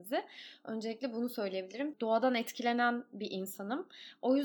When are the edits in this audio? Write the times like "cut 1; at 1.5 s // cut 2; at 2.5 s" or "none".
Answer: cut 1; at 1.9 s